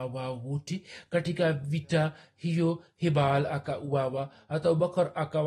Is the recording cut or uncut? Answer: uncut